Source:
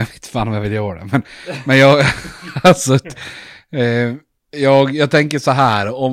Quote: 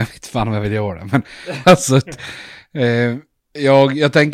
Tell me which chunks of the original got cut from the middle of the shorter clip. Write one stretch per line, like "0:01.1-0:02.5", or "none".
0:01.6-0:02.6